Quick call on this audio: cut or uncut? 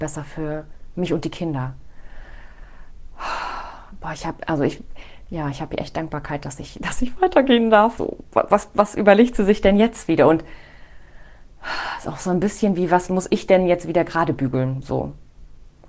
cut